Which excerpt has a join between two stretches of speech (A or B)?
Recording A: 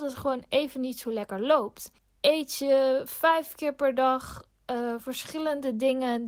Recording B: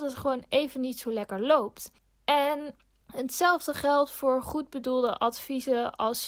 A